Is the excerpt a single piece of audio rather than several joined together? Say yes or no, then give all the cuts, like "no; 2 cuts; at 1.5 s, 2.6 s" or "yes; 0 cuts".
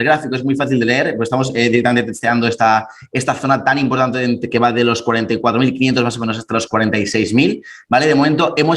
yes; 0 cuts